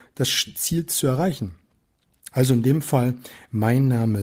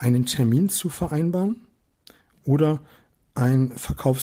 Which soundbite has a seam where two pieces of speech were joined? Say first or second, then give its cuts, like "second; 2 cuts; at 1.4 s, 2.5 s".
first; 1 cut; at 2.3 s